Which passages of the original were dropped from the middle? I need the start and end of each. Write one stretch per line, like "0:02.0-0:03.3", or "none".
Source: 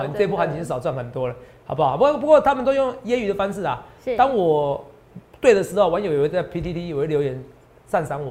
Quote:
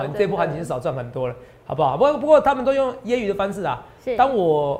none